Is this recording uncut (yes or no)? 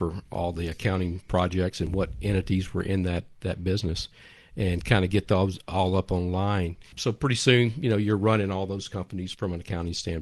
yes